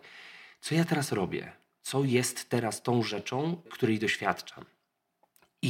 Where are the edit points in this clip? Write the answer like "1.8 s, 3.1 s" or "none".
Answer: 3.7 s